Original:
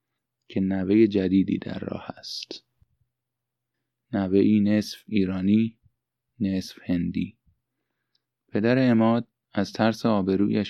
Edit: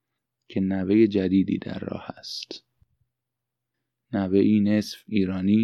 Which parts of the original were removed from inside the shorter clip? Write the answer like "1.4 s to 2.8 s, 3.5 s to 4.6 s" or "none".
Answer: none